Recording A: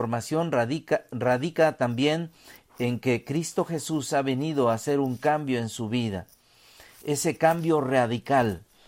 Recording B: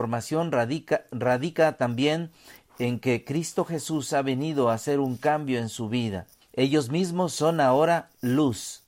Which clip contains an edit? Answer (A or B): B